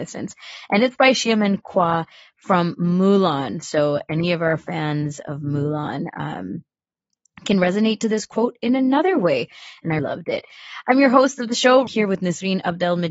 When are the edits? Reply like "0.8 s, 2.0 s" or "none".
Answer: 10.0 s, 11.9 s